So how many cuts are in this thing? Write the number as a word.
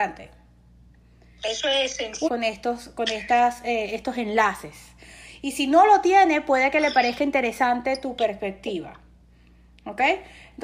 one